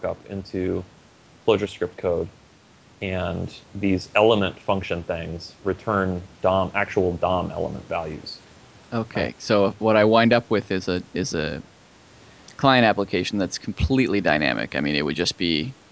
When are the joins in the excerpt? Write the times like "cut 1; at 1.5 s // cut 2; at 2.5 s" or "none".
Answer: cut 1; at 3.6 s